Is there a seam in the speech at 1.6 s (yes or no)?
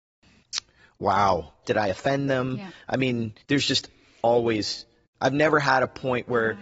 yes